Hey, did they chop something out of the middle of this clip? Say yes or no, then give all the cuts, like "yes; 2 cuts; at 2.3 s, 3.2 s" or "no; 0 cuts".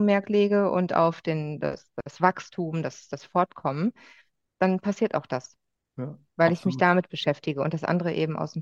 no; 0 cuts